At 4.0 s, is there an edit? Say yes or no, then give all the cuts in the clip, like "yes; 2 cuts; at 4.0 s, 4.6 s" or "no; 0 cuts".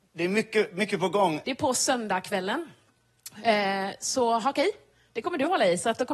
no; 1 cut; at 1.4 s